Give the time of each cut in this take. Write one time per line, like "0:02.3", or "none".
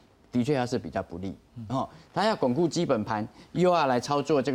none